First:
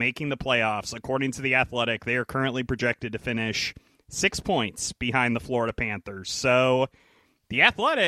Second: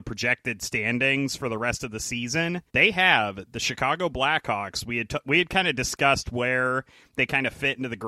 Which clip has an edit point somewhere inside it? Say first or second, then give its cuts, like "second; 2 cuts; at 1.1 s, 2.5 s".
second; 1 cut; at 2.7 s